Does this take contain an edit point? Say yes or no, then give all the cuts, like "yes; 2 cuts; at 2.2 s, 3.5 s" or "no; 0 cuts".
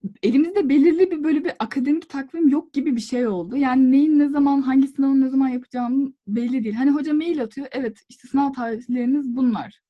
no; 0 cuts